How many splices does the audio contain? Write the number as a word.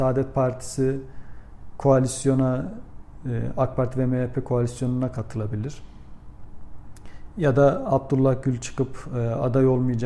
zero